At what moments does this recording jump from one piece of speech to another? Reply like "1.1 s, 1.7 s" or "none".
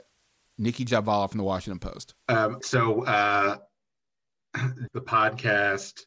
2.6 s, 4.9 s